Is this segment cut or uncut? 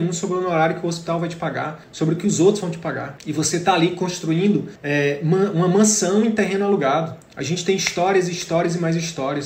uncut